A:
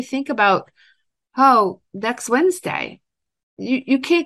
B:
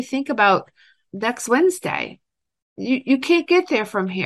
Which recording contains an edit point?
B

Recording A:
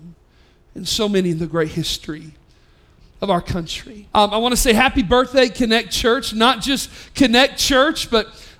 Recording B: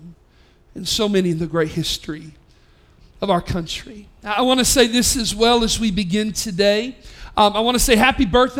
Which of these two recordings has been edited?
A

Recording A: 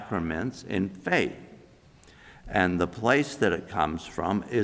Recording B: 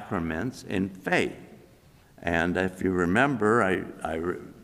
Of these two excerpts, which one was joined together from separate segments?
B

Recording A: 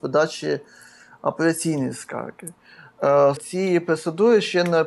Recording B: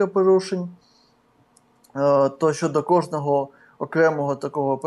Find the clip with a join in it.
A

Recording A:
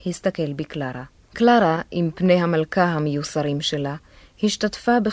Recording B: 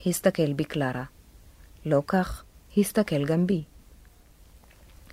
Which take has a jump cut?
A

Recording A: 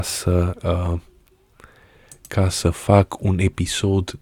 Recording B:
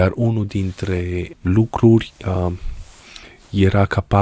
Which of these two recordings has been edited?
B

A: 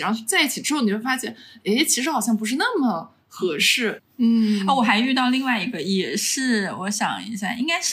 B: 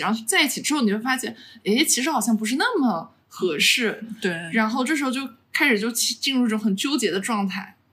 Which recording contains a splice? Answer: A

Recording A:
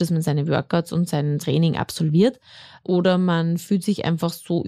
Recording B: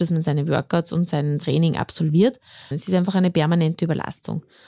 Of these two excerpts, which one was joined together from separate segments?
B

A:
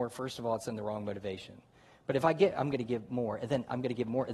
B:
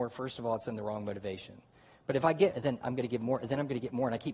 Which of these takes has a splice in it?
B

